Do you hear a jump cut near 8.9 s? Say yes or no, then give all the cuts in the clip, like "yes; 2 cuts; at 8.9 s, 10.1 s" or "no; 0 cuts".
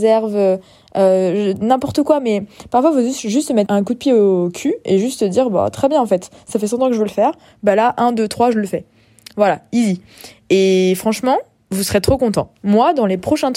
no; 1 cut; at 3.7 s